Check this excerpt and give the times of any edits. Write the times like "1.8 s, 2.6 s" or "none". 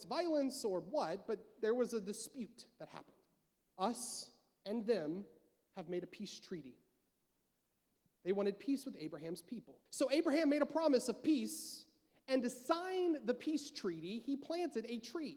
3.6 s, 8.1 s, 9.9 s